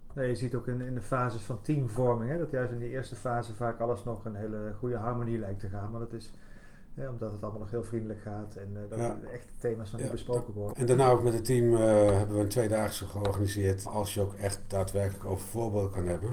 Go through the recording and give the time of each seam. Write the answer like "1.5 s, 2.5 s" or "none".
10.7 s, 13.8 s